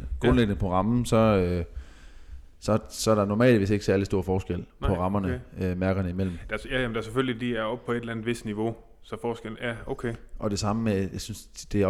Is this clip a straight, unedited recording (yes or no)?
yes